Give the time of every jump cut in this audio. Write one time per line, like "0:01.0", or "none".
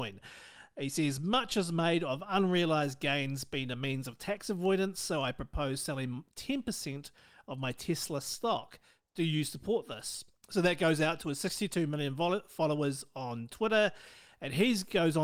none